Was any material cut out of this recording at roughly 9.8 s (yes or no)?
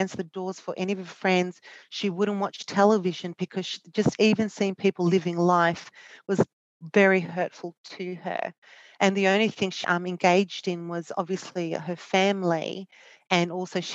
yes